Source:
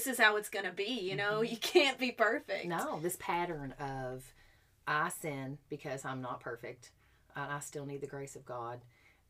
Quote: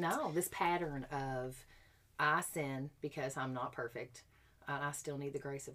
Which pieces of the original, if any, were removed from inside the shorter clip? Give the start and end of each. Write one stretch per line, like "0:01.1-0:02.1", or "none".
none